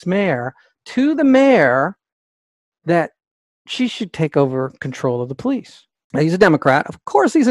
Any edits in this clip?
yes; 2 cuts; at 2.7 s, 6.1 s

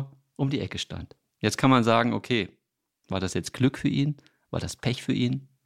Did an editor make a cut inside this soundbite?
no; 0 cuts

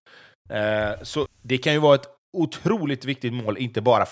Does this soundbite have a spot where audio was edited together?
yes; 1 cut; at 1.3 s

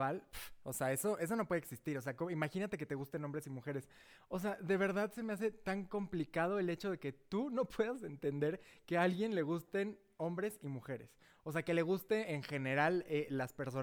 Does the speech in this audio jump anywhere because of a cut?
no; 0 cuts

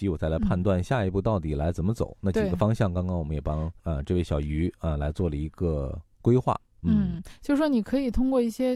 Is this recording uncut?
yes; 0 cuts

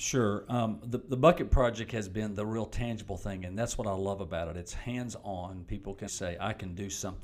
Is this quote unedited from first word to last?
no; 1 cut; at 6.1 s

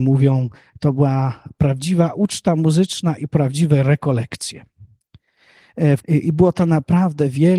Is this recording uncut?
no; 1 cut; at 6.0 s

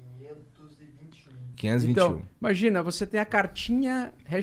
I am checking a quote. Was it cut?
no; 0 cuts

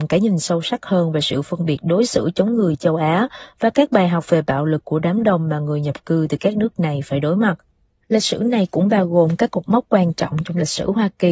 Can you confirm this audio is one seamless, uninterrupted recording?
yes; 0 cuts

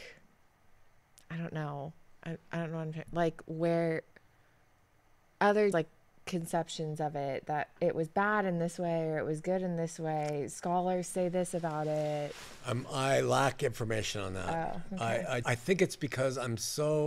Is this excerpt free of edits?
no; 2 cuts; at 5.7 s, 15.4 s

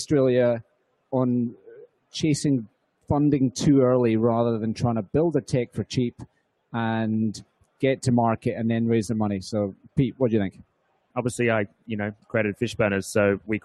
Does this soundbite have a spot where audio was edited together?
yes; 2 cuts; at 11.1 s, 12.2 s

